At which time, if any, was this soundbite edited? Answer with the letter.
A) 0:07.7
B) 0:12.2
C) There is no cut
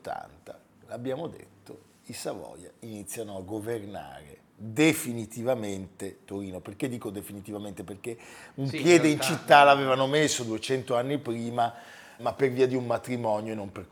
B